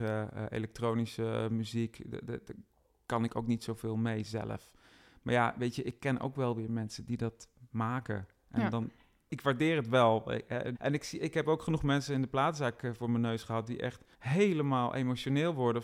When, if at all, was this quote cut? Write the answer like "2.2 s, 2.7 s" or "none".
9.3 s, 10.7 s, 14.1 s